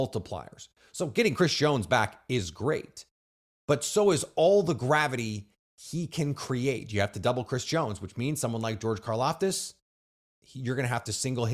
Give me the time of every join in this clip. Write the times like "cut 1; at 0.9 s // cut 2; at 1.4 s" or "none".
none